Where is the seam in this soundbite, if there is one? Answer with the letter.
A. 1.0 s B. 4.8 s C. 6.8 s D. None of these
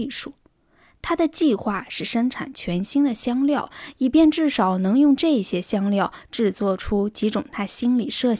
D